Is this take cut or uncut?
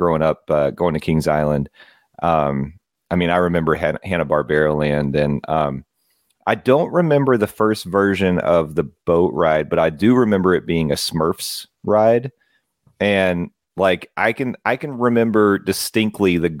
uncut